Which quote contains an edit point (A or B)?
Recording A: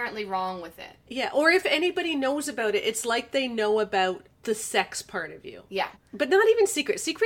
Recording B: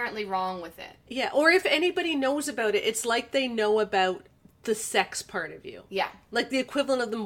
A